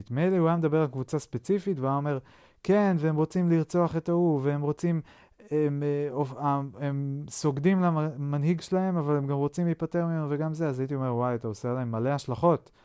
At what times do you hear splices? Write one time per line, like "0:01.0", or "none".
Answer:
none